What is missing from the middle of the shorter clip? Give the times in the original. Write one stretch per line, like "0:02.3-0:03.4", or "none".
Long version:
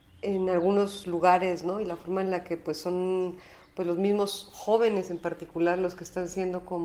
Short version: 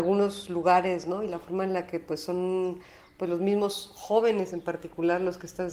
none